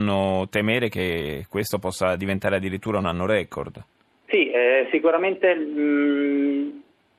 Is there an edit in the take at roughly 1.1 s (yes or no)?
no